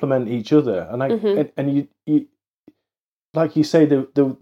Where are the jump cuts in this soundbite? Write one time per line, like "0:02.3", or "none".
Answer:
none